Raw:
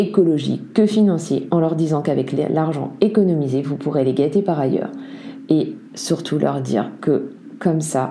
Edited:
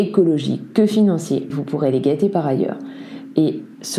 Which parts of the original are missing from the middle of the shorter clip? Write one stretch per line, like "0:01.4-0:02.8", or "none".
0:01.5-0:03.6